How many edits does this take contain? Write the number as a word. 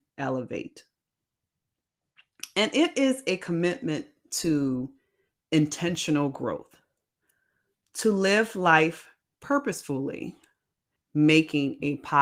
one